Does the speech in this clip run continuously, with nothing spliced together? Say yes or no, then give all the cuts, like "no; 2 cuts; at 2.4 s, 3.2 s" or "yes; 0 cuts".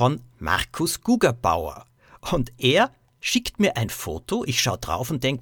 yes; 0 cuts